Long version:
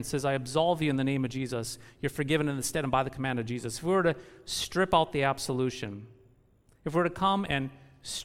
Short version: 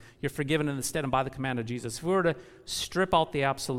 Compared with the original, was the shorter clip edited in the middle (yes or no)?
no